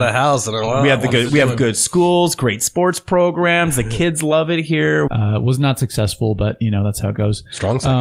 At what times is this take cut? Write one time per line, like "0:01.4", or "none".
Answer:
0:05.1